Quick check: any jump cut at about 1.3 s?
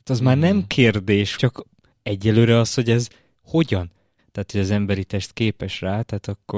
yes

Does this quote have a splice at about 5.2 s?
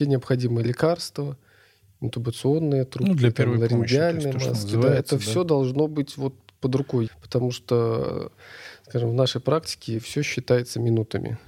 no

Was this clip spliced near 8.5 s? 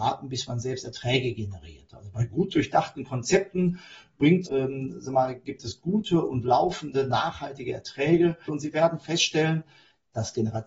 yes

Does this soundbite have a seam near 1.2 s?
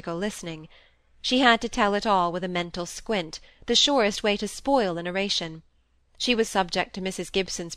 no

